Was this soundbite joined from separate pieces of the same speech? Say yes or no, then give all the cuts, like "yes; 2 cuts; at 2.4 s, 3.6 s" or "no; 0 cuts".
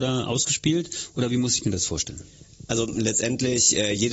no; 0 cuts